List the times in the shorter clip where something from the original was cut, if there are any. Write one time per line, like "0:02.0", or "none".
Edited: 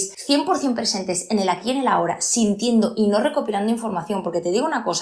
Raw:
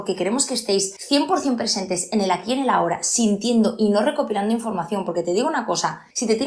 none